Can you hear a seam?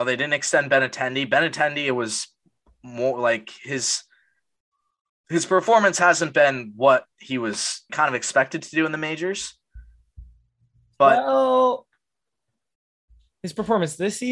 yes; 1 cut; at 7.9 s

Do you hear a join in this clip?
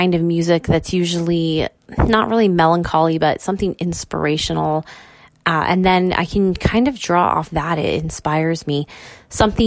no; 0 cuts

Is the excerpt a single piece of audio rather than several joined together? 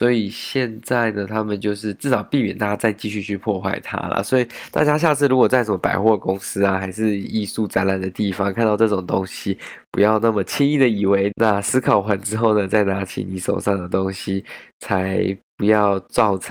no; 1 cut; at 11.3 s

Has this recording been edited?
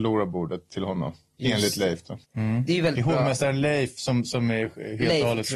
yes; 1 cut; at 2.2 s

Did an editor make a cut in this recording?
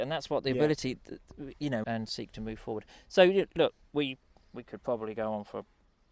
yes; 1 cut; at 1.8 s

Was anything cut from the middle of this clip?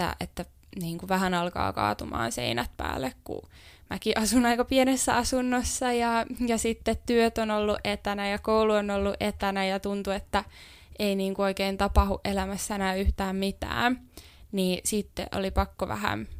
no; 0 cuts

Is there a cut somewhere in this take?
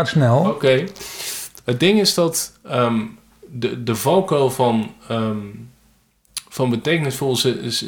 no; 0 cuts

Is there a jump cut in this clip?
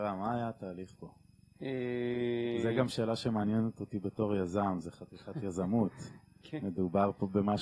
no; 0 cuts

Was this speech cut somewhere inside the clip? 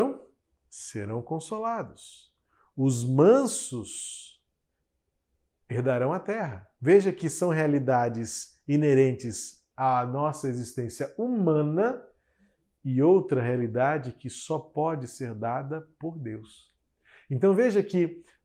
no; 0 cuts

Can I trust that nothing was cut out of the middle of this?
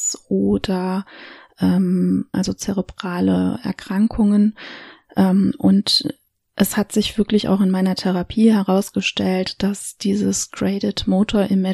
no; 1 cut; at 2.3 s

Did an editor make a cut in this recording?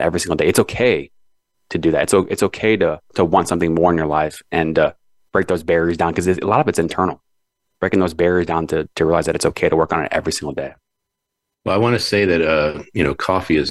no; 0 cuts

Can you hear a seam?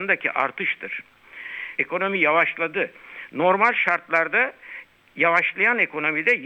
yes; 1 cut; at 1.8 s

